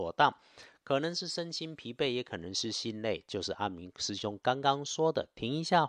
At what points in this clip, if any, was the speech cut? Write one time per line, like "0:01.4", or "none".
none